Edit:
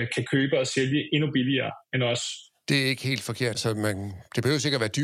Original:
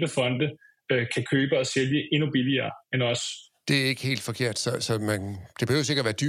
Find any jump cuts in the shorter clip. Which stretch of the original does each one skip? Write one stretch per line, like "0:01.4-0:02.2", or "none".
0:04.5-0:04.8